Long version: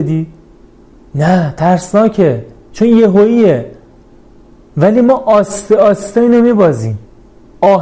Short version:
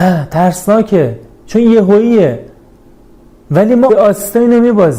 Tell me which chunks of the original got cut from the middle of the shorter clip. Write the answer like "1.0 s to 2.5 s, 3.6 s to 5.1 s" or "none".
5.1 s to 5.7 s